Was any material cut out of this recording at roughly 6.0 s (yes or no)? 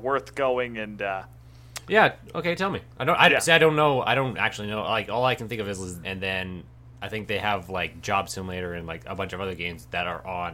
yes